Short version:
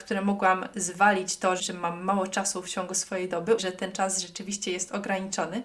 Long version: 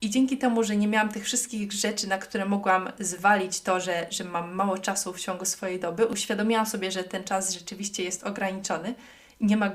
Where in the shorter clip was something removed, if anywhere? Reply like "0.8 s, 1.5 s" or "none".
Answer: 1.6 s, 3.6 s